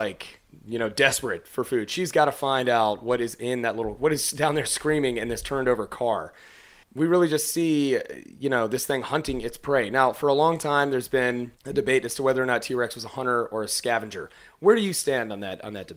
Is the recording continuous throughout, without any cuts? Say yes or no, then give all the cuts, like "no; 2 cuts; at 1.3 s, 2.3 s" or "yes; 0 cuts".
no; 1 cut; at 6.8 s